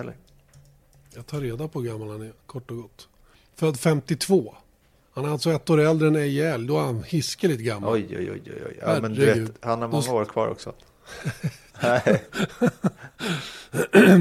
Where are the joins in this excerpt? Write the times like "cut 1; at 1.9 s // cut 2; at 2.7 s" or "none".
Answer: cut 1; at 11.7 s